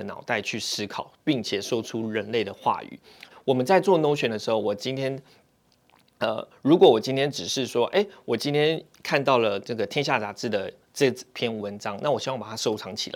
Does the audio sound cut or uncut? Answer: cut